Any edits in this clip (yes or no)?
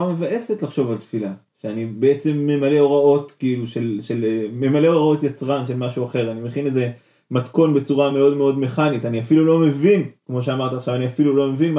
no